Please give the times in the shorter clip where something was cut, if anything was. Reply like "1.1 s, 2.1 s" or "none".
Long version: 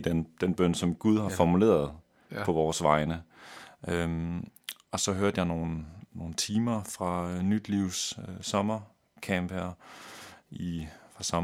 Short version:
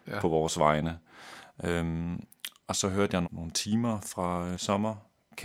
3.2 s, 4.5 s